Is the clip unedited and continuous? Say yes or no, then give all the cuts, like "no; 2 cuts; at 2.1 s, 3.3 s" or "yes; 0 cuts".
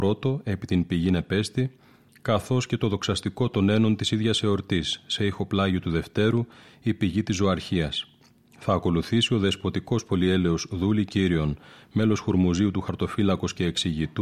yes; 0 cuts